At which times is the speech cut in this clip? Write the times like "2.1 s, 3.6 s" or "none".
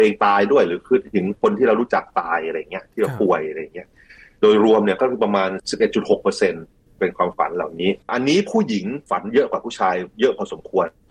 8.0 s